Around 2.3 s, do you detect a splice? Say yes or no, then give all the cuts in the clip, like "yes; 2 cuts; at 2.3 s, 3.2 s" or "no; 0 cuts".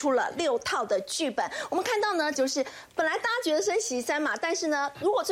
yes; 1 cut; at 2.3 s